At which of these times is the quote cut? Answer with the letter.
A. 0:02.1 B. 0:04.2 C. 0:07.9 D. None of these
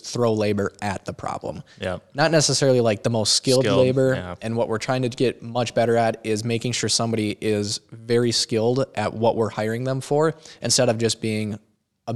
D